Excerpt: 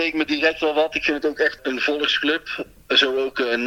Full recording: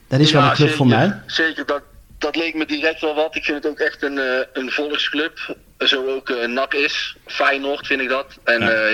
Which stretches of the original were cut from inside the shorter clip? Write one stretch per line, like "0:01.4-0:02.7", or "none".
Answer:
0:04.0-0:04.5